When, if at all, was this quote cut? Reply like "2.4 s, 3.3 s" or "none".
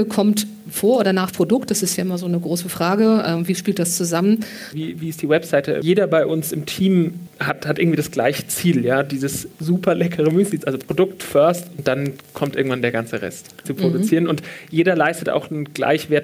4.7 s, 10.6 s, 13.6 s